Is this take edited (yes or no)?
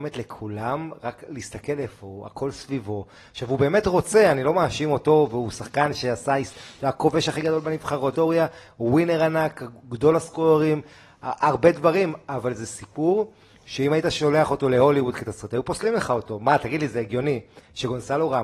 yes